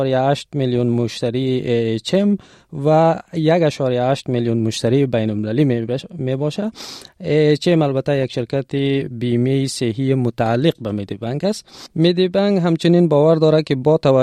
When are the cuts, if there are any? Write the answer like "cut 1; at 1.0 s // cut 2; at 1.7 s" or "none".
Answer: cut 1; at 11.9 s